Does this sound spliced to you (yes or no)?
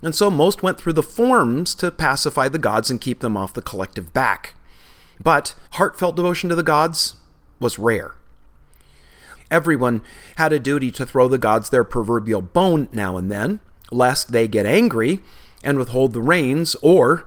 yes